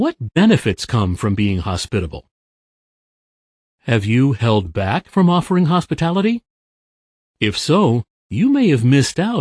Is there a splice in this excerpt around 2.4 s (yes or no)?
no